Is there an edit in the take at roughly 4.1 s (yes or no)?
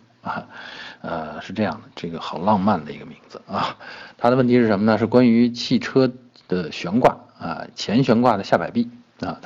no